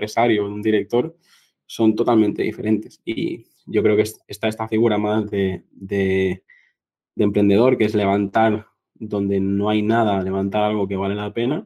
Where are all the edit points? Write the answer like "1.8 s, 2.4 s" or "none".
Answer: none